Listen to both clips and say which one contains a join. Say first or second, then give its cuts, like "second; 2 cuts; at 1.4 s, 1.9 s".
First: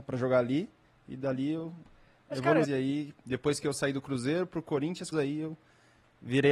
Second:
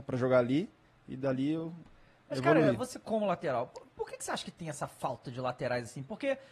first; 2 cuts; at 2.6 s, 5.1 s